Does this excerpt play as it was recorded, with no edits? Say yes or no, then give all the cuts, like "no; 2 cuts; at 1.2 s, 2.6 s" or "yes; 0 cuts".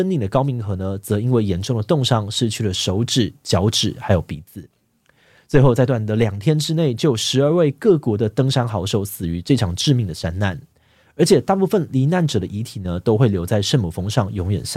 no; 1 cut; at 5.9 s